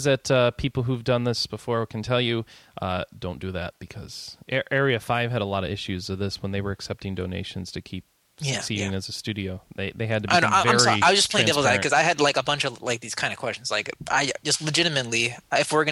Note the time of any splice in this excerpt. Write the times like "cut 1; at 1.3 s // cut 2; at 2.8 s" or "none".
none